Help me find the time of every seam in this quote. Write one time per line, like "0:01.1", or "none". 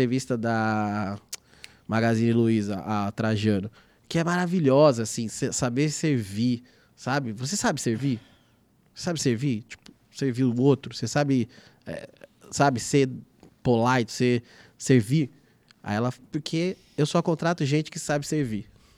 0:14.1